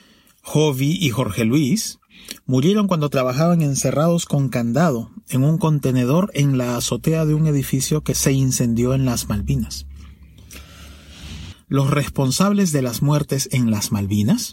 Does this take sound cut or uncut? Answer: cut